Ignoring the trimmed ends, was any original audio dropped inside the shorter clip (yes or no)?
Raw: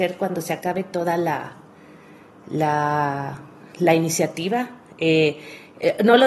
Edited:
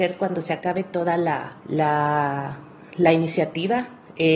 yes